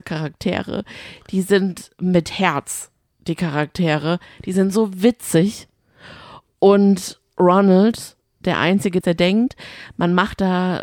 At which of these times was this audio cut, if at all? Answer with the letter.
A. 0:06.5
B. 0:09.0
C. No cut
B